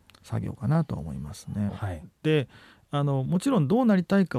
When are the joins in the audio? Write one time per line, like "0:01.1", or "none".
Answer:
0:01.7